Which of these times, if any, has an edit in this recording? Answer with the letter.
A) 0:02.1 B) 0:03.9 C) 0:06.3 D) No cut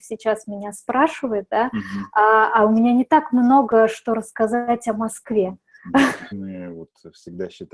C